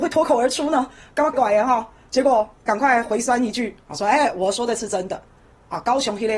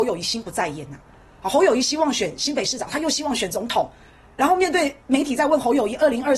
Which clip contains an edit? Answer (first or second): first